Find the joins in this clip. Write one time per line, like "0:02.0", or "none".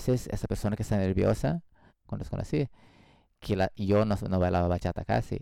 0:01.9